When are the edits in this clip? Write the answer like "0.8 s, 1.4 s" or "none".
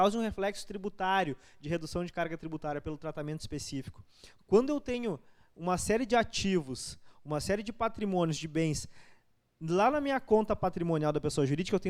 4.4 s